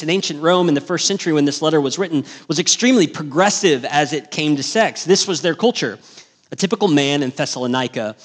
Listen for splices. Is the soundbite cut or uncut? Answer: cut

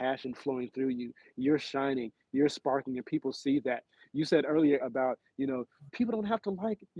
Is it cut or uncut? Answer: cut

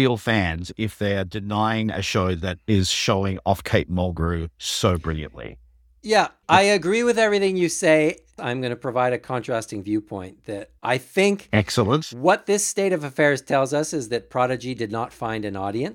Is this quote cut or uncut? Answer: cut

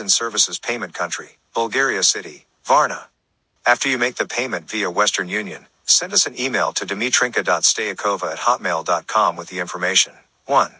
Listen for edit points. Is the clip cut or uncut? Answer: cut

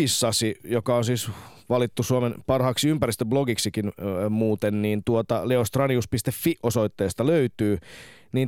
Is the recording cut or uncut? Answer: uncut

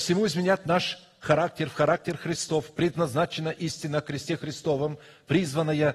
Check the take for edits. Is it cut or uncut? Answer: uncut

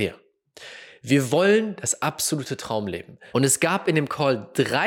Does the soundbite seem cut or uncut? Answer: cut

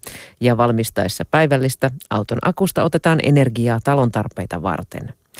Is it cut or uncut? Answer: uncut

